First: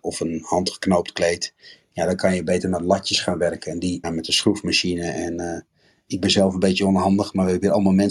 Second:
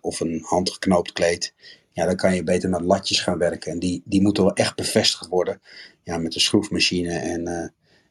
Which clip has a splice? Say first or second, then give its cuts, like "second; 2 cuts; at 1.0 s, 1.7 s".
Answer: first; 1 cut; at 4.0 s